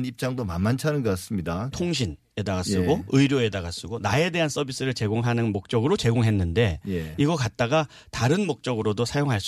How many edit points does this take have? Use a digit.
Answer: 1